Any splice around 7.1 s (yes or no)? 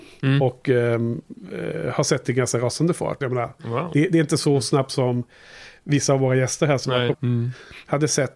yes